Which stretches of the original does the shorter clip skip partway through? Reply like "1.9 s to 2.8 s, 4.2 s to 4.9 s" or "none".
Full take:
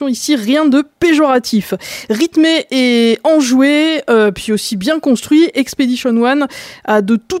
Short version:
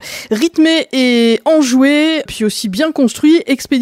4.0 s to 4.3 s